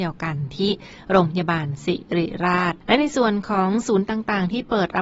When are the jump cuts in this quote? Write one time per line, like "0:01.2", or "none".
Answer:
0:02.8